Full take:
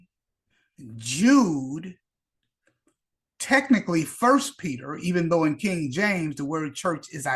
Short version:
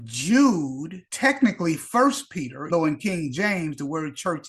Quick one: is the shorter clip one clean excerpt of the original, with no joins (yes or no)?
no